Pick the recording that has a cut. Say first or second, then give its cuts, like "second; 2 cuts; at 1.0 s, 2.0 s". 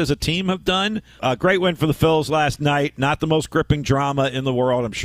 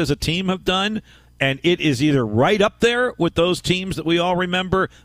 first; 1 cut; at 1.2 s